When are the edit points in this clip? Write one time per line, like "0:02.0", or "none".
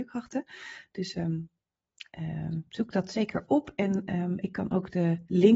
none